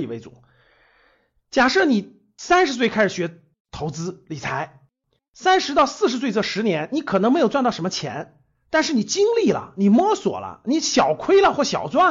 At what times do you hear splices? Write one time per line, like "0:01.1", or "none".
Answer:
none

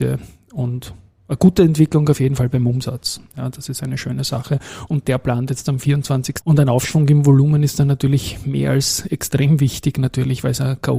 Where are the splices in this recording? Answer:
0:04.9
0:06.4

